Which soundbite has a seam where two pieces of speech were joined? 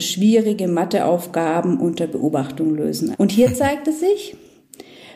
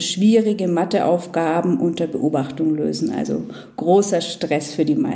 first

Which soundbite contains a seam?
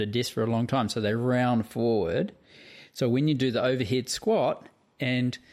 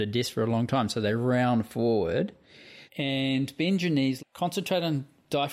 second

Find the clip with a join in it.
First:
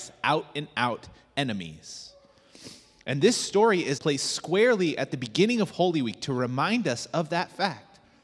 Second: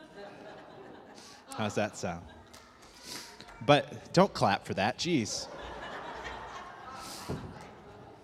first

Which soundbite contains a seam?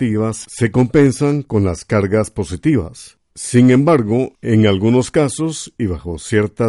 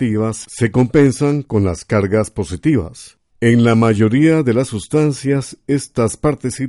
second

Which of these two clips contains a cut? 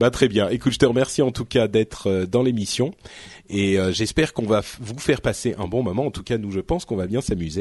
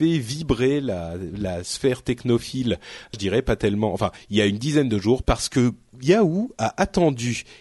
second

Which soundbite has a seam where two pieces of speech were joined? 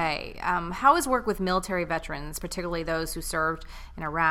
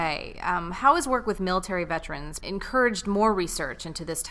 second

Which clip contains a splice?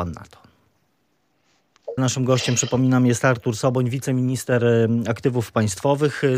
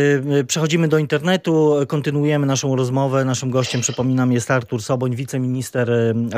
first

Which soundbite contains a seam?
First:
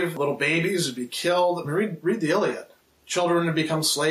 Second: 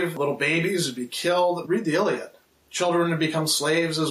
second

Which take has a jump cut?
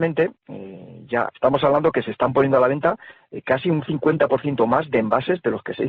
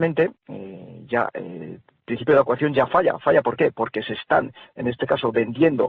first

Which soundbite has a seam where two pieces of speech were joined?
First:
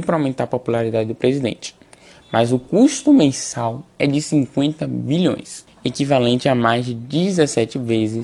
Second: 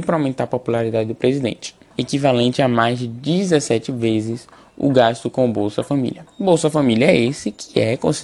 second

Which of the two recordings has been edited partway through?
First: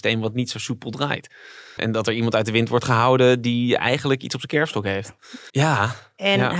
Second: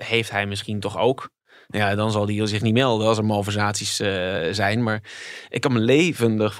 first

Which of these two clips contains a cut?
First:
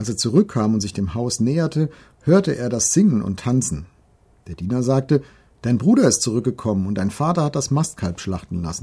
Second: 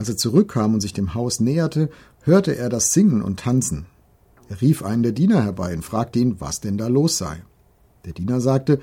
first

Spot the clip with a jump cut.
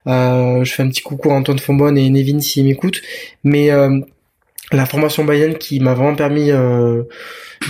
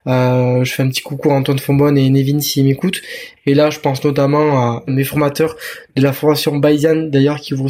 second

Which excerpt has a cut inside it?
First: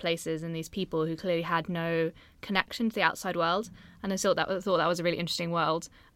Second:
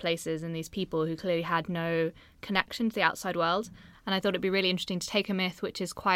second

